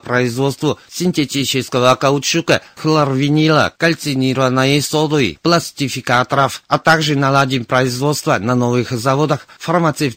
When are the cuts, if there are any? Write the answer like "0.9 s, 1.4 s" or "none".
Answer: none